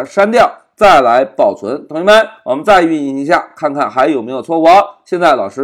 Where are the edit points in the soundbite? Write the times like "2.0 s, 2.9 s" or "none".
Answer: none